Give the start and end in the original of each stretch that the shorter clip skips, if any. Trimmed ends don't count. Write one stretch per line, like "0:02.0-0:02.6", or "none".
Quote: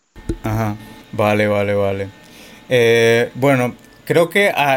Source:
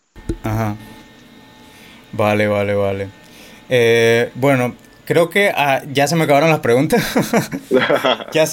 0:01.0-0:02.0